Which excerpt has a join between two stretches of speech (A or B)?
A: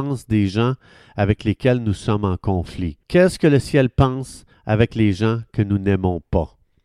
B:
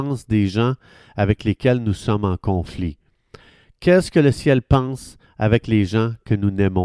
A